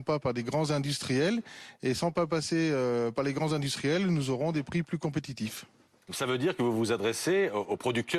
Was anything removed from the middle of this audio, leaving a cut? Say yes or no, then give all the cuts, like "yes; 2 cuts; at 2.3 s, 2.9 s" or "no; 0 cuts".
no; 0 cuts